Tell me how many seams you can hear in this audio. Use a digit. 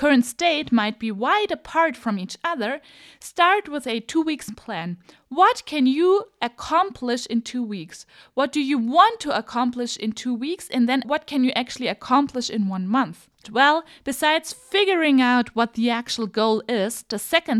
2